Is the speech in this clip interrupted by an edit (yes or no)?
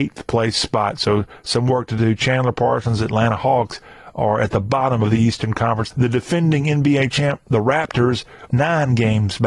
yes